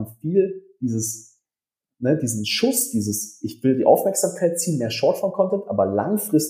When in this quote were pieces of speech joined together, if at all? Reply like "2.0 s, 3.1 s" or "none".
none